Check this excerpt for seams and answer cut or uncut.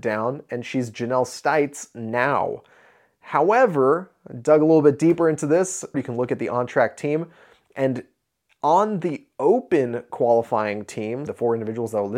cut